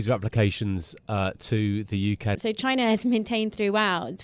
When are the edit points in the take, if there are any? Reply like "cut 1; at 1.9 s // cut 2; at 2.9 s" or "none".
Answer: cut 1; at 2.4 s